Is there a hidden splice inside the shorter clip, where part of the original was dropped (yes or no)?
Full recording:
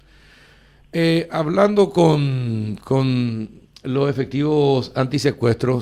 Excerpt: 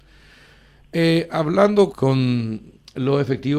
yes